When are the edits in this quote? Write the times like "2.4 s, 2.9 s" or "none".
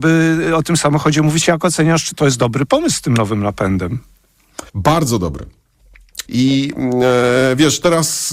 4.7 s, 6.3 s